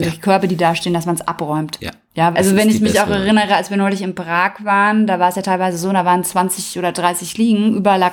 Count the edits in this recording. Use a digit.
1